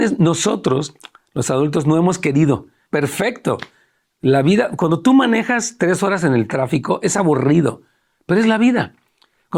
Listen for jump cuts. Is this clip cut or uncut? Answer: cut